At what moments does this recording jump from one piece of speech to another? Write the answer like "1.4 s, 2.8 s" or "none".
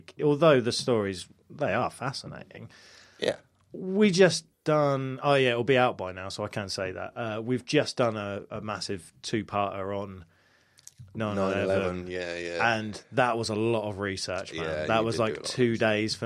4.5 s

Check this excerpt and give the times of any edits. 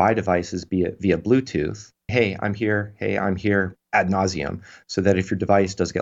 2.1 s

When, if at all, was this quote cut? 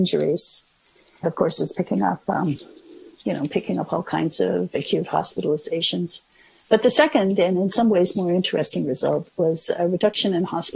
1.2 s

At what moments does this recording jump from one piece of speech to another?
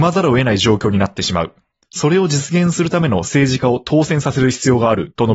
1.7 s

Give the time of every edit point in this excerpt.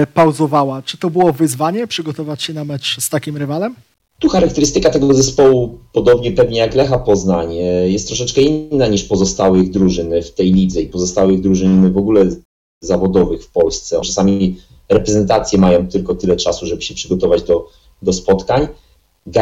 14.0 s

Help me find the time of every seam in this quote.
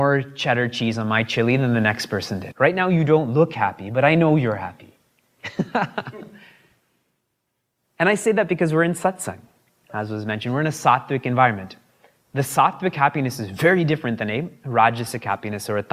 2.5 s

